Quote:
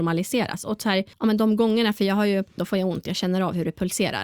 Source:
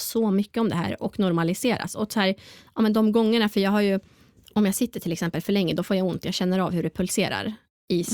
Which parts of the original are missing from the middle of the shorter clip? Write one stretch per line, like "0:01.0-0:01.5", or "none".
0:02.4-0:02.7
0:04.1-0:05.8